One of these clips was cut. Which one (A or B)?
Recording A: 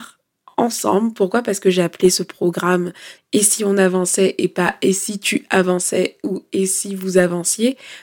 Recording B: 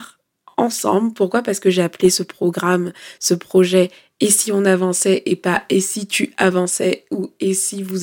A